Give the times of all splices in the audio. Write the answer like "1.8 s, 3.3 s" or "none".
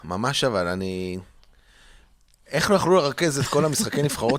none